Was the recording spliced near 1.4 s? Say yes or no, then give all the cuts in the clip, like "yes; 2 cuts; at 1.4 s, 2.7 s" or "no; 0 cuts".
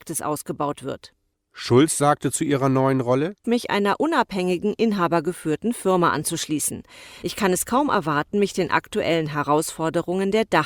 no; 2 cuts; at 3.4 s, 7.2 s